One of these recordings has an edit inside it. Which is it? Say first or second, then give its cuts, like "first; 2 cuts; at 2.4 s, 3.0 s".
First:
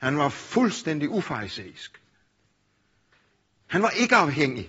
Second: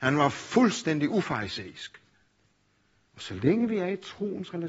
second; 1 cut; at 3.1 s